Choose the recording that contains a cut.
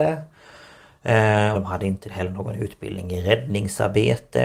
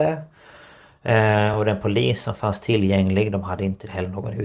first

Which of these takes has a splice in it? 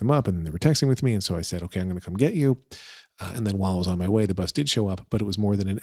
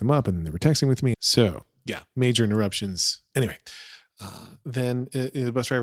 second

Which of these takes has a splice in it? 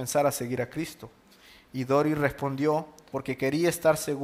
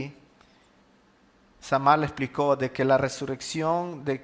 first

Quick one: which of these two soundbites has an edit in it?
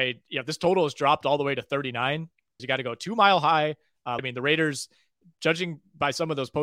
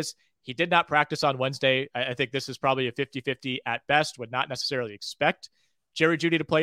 first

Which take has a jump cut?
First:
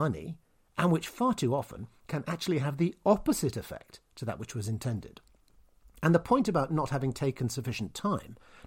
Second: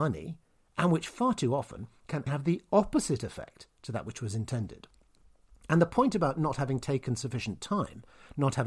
second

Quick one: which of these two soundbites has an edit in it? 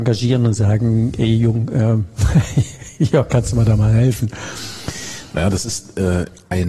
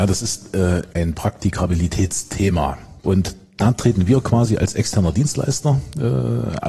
second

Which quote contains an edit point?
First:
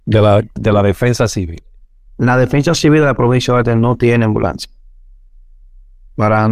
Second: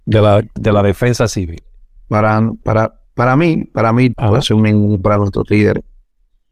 second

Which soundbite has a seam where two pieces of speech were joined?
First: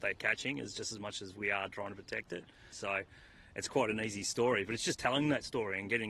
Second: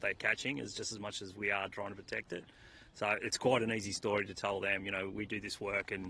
first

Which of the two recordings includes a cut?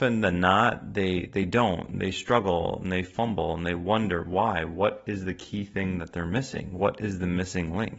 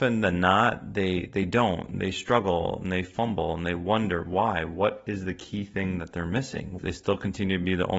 second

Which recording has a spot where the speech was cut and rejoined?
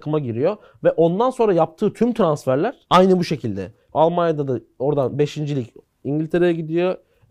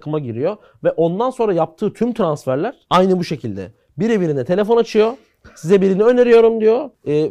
first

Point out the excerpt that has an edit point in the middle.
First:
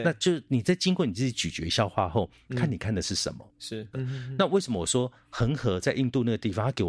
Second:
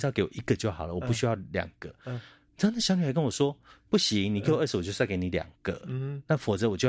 first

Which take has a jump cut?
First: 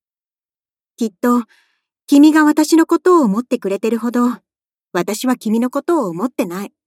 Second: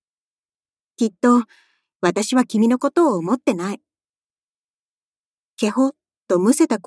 second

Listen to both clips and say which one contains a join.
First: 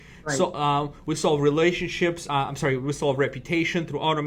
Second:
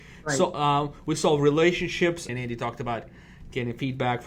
second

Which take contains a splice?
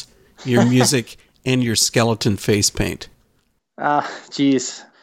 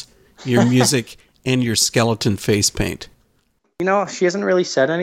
second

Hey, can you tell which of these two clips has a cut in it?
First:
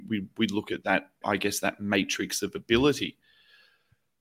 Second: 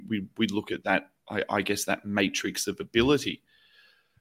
first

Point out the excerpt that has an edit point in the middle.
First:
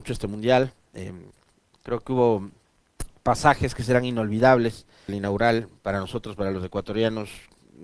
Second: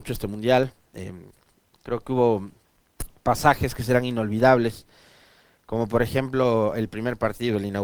first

